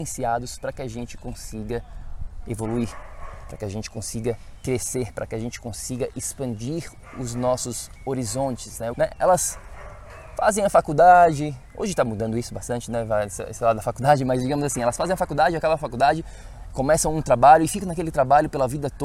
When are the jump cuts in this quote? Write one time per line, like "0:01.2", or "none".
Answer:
0:08.9